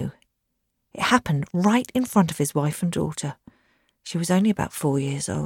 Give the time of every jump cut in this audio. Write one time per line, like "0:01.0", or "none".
none